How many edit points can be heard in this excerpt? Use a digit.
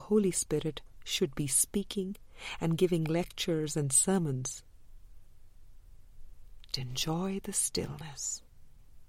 1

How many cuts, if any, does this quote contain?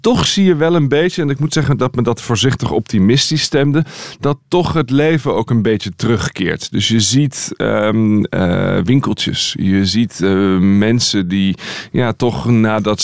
0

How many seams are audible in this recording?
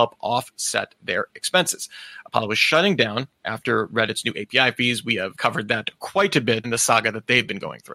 2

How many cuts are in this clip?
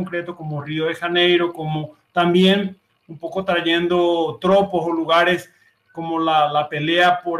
0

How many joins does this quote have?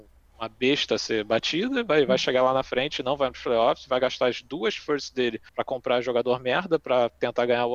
1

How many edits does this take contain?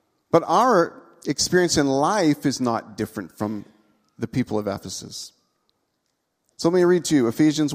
1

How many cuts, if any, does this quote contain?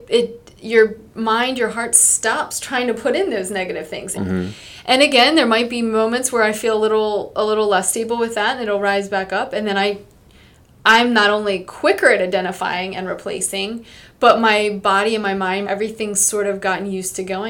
2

